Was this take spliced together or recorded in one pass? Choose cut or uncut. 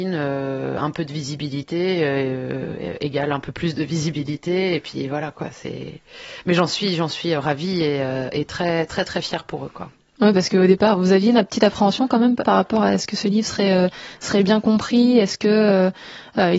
cut